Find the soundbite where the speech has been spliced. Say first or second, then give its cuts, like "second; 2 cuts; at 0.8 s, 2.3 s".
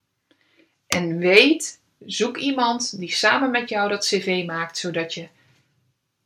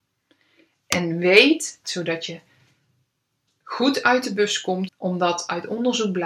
second; 2 cuts; at 1.8 s, 4.9 s